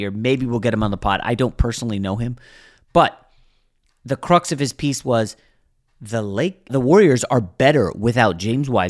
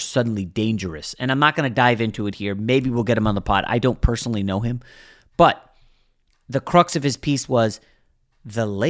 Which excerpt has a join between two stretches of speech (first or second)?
first